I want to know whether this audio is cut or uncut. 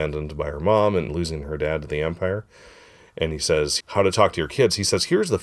cut